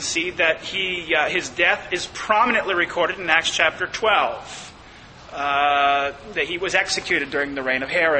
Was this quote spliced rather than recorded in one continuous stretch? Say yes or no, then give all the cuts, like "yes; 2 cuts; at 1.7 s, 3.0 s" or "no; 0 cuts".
no; 0 cuts